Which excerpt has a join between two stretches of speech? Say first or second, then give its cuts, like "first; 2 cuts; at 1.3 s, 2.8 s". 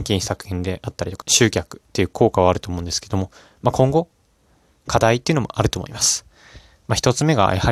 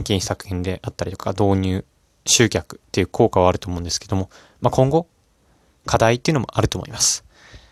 first; 1 cut; at 1.2 s